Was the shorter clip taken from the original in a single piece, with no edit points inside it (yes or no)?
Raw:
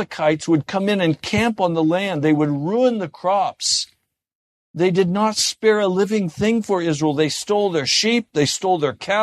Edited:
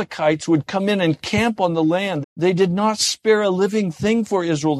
no